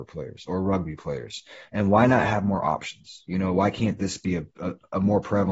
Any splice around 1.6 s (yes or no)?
no